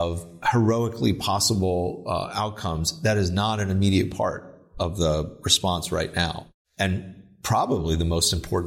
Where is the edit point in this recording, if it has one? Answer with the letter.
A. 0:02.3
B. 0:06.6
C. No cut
C